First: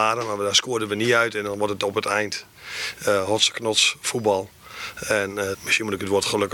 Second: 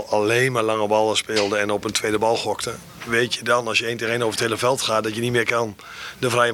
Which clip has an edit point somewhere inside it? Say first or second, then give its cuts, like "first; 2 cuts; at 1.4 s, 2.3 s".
first; 1 cut; at 5.5 s